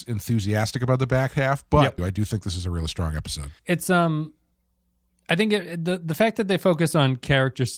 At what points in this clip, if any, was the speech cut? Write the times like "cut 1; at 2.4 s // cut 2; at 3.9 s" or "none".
cut 1; at 2.0 s // cut 2; at 3.6 s